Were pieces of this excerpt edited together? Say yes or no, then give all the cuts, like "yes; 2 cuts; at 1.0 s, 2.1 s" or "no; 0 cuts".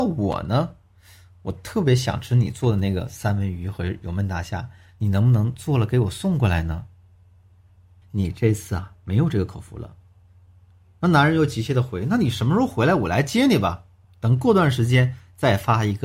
yes; 2 cuts; at 8.0 s, 14.0 s